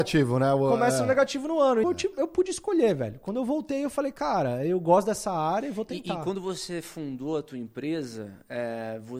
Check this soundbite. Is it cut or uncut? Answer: cut